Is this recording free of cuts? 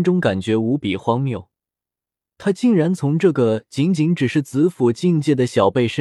yes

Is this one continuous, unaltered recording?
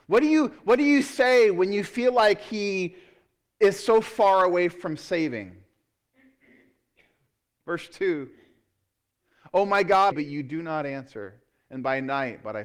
no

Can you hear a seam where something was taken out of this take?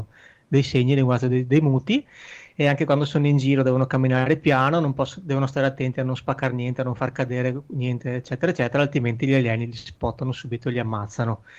no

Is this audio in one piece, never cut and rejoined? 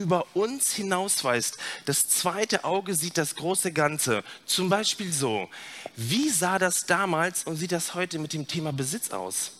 yes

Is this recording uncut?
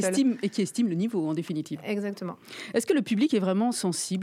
yes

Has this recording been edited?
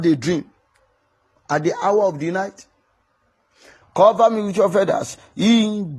yes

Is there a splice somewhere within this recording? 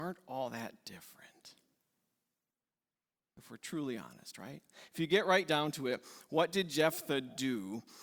no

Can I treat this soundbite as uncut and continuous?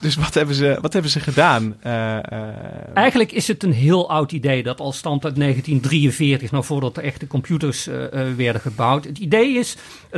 yes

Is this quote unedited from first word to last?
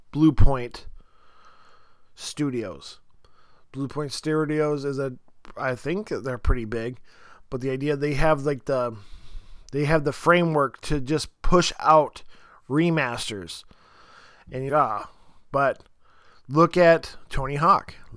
no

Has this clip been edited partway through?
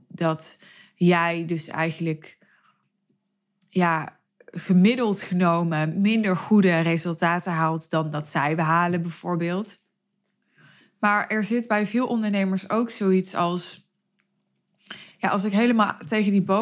no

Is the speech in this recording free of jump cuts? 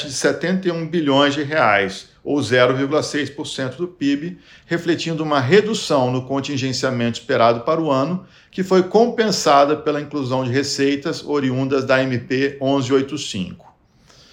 yes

